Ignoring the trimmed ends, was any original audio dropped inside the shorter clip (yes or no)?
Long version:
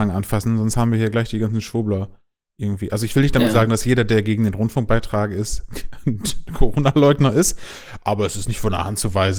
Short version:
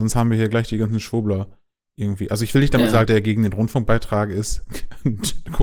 yes